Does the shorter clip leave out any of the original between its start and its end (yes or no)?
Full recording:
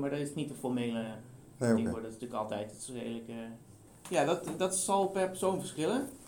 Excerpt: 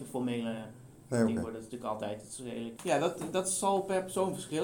yes